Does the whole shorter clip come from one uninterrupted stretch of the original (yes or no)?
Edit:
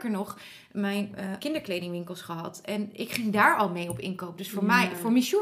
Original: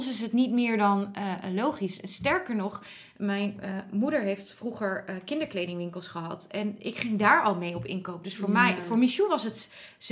no